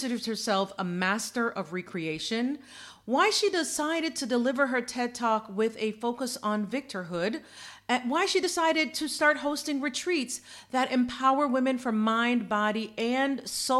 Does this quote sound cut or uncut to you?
uncut